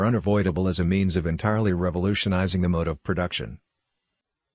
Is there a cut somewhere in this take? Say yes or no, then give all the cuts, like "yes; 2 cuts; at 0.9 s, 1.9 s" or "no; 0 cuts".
no; 0 cuts